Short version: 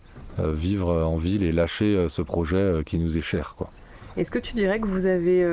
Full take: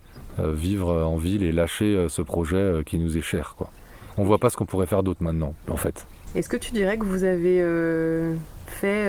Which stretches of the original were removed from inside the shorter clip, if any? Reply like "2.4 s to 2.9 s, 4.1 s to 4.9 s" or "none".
4.1 s to 6.3 s